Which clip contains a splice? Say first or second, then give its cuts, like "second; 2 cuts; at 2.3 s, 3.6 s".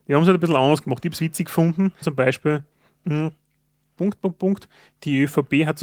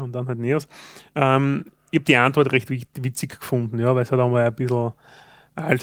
first; 2 cuts; at 2.0 s, 3.9 s